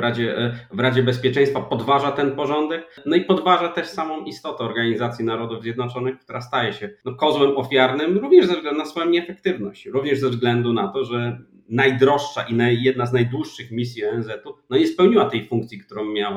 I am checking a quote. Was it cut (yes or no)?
no